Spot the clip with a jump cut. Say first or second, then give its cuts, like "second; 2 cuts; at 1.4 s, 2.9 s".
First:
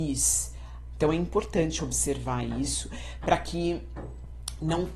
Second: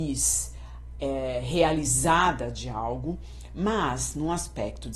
first; 1 cut; at 0.9 s